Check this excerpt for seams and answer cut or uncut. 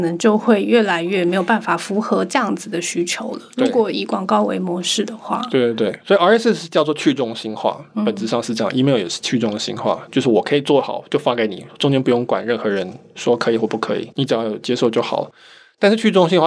uncut